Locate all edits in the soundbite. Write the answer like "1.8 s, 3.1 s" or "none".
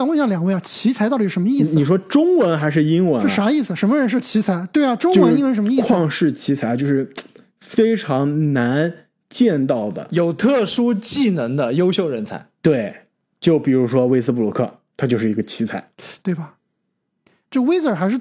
14.9 s, 16.2 s